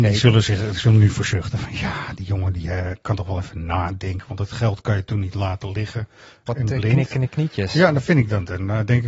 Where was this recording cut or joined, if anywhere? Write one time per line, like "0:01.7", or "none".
0:06.5